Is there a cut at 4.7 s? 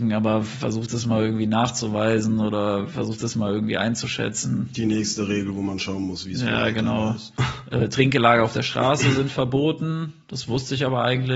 no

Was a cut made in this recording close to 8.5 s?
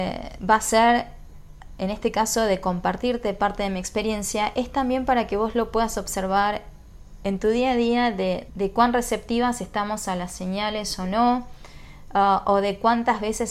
yes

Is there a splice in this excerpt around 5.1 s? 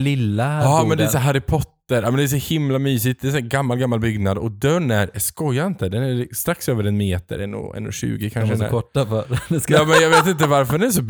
no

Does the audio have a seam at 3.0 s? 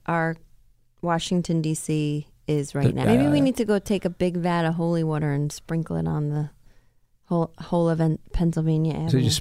yes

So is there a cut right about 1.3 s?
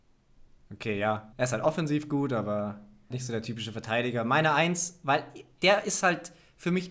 yes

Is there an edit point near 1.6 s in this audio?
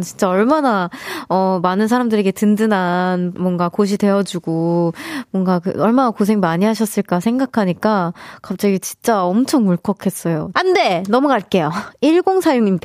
no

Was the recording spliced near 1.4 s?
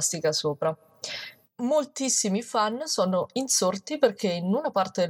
yes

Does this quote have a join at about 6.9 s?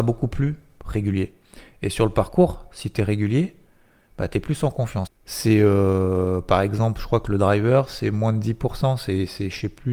no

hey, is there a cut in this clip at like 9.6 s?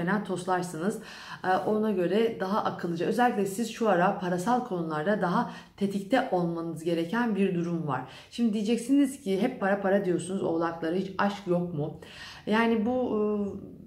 yes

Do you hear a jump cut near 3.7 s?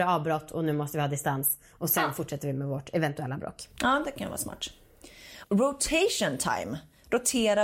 no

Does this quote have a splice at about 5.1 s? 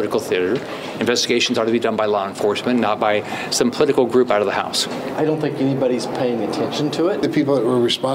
yes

